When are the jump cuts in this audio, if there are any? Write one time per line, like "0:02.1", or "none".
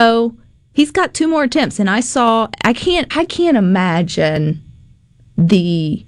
0:03.1